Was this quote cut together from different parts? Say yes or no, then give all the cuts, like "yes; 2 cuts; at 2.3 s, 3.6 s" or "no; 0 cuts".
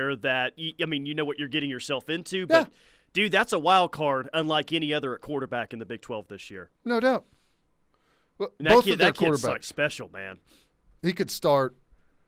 yes; 1 cut; at 11.0 s